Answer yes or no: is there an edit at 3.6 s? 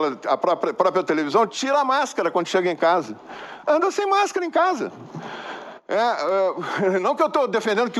no